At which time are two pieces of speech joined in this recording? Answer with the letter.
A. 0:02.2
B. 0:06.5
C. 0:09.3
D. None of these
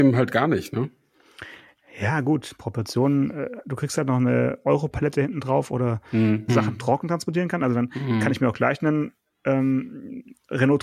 B